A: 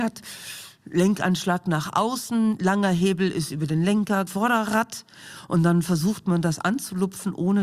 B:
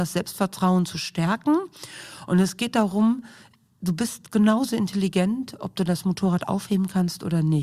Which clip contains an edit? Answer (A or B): A